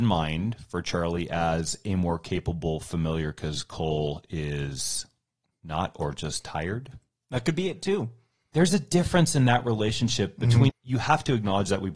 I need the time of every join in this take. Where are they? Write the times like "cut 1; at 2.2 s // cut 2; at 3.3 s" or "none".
cut 1; at 10.7 s